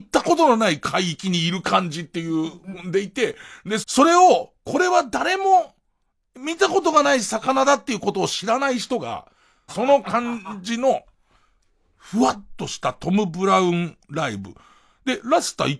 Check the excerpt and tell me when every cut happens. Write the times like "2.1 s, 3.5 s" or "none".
3.8 s, 9.7 s